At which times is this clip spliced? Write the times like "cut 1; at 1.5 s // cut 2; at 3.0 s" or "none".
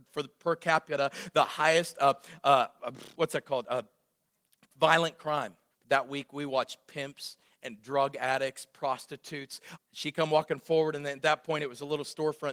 cut 1; at 5.7 s // cut 2; at 9.8 s